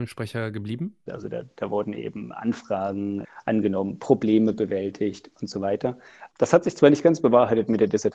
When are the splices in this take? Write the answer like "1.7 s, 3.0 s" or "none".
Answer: 1.1 s, 6.3 s